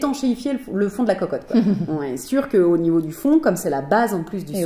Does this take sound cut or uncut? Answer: uncut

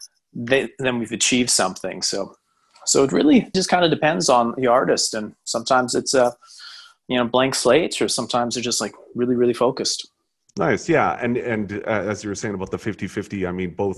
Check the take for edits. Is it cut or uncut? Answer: cut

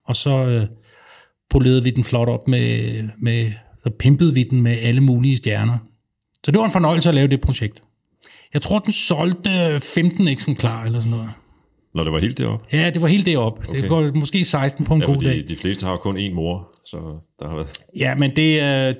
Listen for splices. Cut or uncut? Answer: uncut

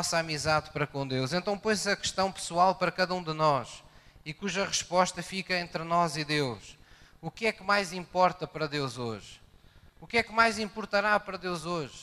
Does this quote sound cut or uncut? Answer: uncut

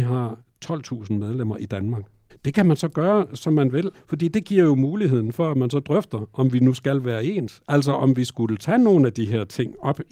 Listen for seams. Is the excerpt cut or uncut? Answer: cut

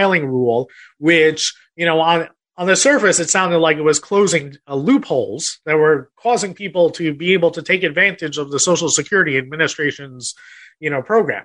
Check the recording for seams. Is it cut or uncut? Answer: uncut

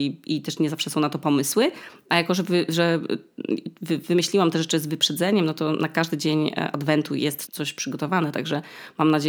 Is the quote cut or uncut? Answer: cut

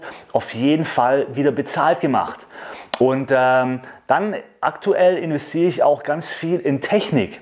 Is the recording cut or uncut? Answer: uncut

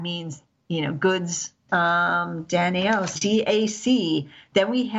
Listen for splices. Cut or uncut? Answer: cut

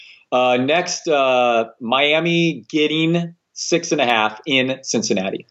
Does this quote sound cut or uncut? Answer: uncut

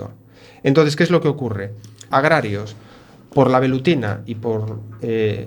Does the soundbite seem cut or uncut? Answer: cut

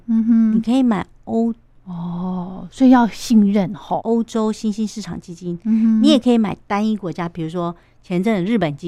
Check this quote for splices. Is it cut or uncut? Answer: cut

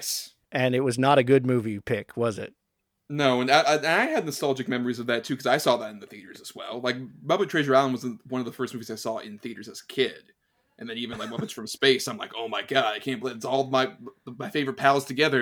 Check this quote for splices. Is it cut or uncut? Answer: uncut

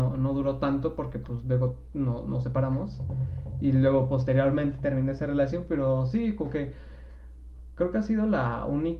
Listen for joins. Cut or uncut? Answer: uncut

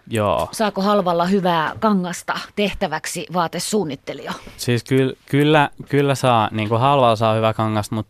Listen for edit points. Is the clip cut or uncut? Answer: uncut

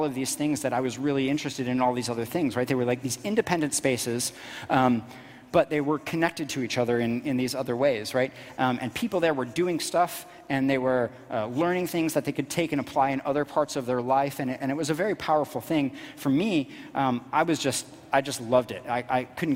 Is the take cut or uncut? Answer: uncut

